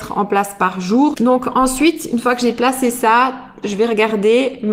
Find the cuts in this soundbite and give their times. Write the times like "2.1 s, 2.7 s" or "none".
1.1 s, 3.6 s

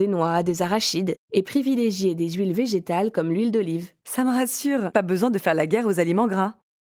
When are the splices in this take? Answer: 4.9 s

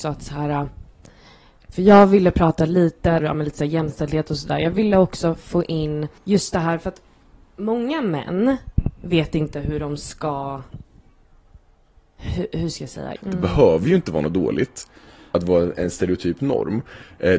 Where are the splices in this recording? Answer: 3.2 s, 6.2 s, 13.2 s

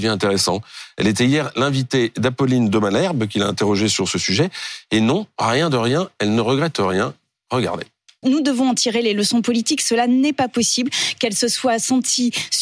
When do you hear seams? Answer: 8.2 s

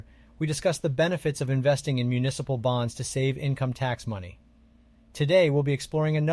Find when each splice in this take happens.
none

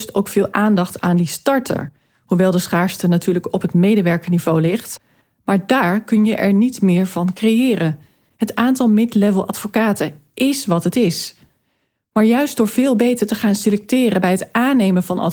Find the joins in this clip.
none

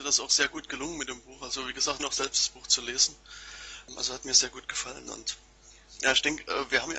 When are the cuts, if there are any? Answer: 2.0 s

